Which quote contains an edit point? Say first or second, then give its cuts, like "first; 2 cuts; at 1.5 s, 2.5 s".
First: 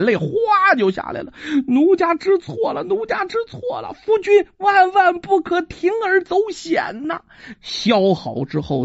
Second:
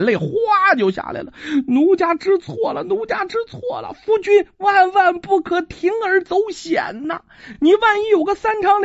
first; 1 cut; at 7.5 s